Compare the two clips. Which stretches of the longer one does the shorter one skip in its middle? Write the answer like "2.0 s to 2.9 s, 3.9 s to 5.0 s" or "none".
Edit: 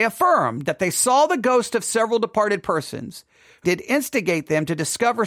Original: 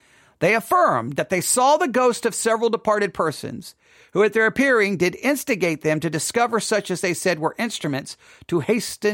4.1 s to 5.0 s